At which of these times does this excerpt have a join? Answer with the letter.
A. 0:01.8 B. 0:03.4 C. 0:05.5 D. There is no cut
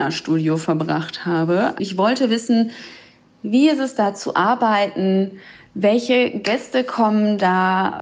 A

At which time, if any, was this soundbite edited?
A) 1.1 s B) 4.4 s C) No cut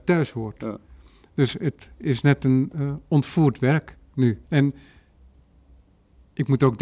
B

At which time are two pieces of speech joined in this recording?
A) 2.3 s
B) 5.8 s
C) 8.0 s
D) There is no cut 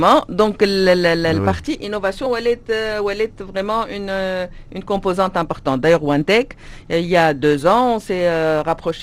D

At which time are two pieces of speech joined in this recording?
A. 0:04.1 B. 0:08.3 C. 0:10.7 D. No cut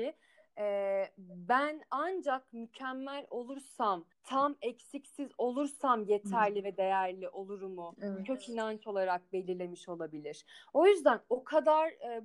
A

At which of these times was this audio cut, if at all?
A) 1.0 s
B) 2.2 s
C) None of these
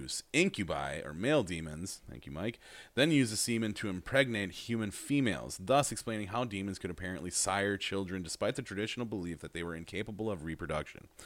C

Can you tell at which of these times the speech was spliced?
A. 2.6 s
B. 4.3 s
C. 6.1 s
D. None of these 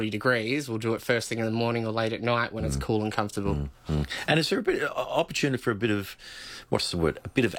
D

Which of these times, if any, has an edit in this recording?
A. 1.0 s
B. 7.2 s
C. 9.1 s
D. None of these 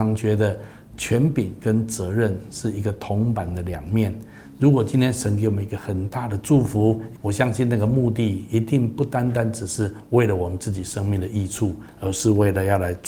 B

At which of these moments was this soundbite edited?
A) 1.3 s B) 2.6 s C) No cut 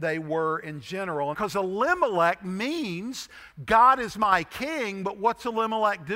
A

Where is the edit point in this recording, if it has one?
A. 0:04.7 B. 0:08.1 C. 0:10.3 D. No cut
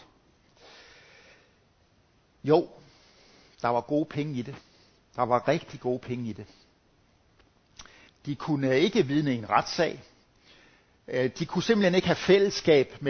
B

